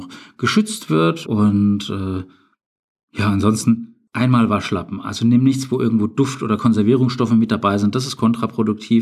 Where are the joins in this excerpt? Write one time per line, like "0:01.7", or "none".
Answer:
0:01.2

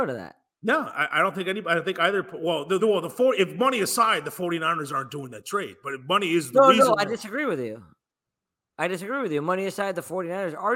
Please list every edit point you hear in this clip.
0:02.8

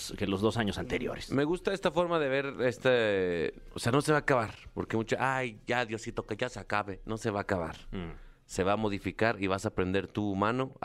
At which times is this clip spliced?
none

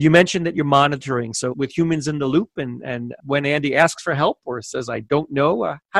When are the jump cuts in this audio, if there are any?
0:01.5
0:03.2

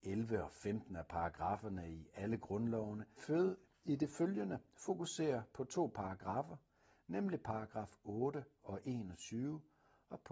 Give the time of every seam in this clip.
0:03.2

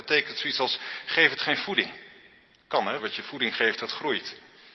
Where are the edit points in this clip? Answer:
0:03.0

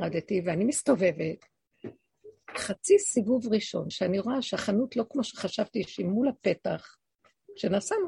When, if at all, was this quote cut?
none

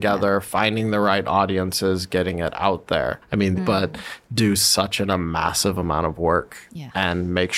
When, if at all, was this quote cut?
0:03.6

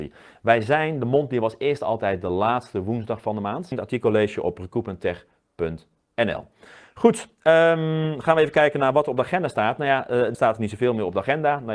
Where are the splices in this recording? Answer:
0:03.7
0:10.3

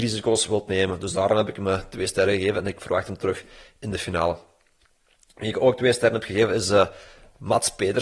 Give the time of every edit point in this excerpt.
none

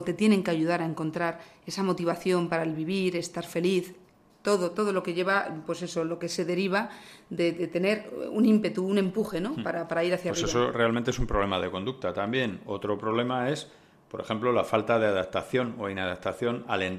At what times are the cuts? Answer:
none

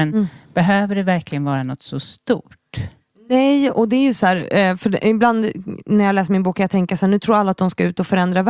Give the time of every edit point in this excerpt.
none

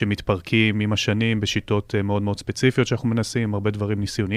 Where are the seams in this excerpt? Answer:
none

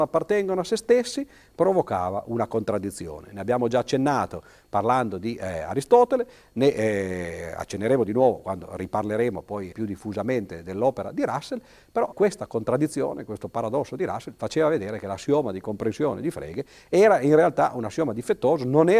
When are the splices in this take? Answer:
0:09.7
0:12.1

